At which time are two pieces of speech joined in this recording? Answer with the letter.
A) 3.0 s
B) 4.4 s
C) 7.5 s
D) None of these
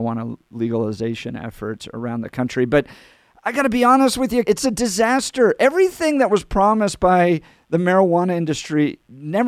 B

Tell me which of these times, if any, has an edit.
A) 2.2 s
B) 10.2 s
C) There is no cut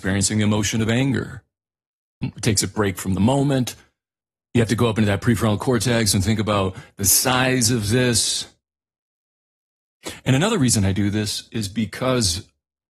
A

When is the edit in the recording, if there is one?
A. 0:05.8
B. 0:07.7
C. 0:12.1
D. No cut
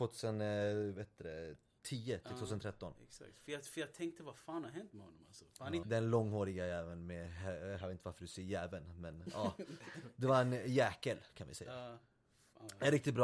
A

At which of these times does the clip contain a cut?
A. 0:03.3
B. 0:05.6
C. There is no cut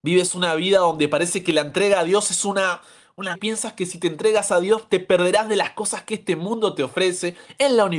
A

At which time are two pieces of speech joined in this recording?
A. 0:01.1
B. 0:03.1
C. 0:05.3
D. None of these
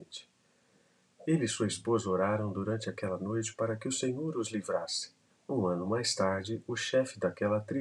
C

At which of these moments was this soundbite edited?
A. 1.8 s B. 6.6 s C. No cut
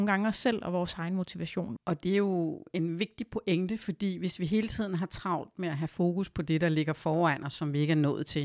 A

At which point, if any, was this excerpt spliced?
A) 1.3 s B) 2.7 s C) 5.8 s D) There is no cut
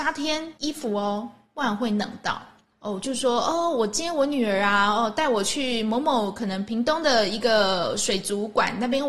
B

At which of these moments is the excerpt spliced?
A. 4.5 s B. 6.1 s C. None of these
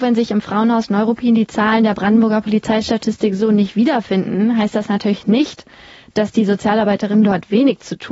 C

